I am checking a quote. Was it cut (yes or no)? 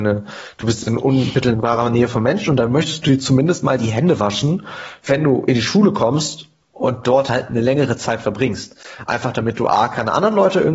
no